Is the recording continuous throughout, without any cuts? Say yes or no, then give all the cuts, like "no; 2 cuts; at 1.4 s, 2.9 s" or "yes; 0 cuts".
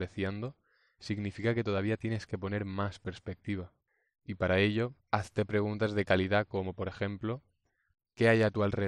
yes; 0 cuts